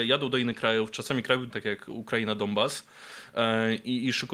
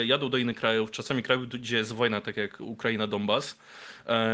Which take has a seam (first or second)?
first